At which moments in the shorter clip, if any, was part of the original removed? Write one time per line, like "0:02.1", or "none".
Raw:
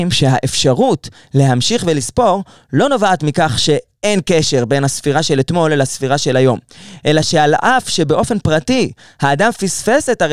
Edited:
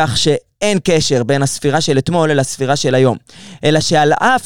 none